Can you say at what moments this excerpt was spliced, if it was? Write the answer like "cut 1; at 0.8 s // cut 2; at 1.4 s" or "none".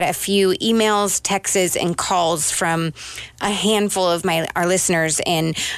none

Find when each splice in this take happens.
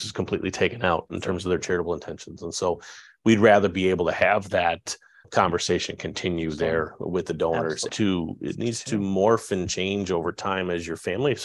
cut 1; at 5.2 s // cut 2; at 7.9 s

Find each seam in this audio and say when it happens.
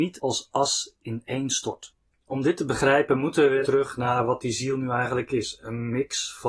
cut 1; at 3.6 s

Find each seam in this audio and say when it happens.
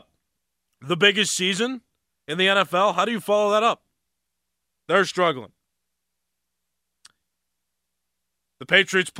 cut 1; at 4.7 s

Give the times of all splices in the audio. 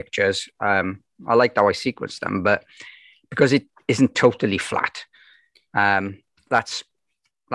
none

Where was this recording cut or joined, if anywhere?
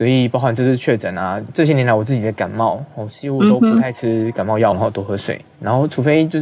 cut 1; at 1.5 s // cut 2; at 4.7 s

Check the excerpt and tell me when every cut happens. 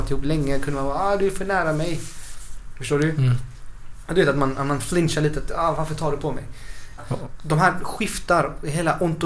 cut 1; at 7.0 s

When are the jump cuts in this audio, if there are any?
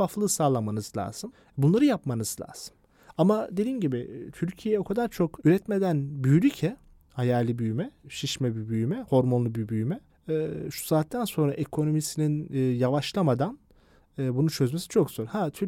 none

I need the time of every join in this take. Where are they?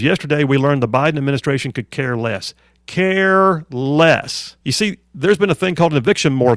cut 1; at 4.6 s

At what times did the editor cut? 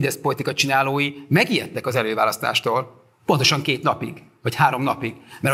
none

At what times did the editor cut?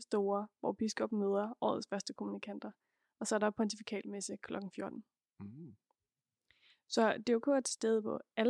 none

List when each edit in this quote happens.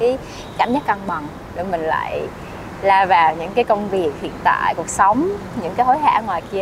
none

